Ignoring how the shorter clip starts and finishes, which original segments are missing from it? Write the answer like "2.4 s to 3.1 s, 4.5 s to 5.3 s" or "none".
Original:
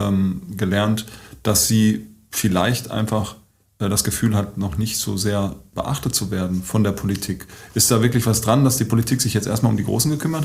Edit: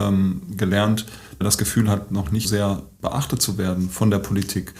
1.4 s to 3.9 s, 4.9 s to 5.2 s